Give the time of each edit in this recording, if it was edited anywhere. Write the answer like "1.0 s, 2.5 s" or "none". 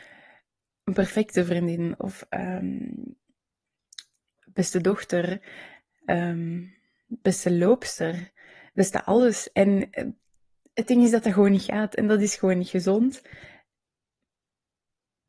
4.4 s